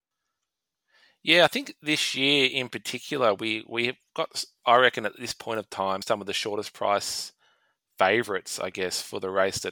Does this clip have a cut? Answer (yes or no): no